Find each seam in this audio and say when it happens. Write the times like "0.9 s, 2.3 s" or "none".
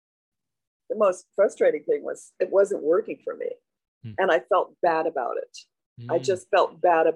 none